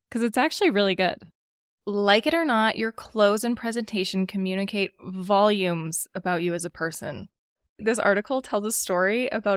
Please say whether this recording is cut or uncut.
cut